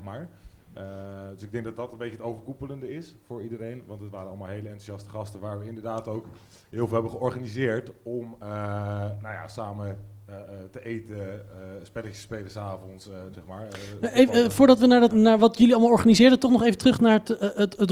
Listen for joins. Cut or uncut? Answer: cut